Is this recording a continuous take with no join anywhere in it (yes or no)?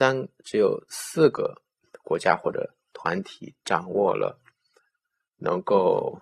yes